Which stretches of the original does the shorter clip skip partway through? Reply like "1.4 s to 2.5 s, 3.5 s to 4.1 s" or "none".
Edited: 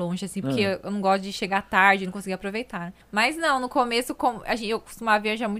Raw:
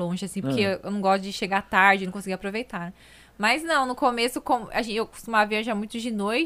3.0 s to 3.3 s